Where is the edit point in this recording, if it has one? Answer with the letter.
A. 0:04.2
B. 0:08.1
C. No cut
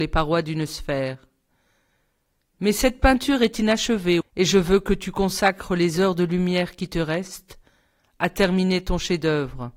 A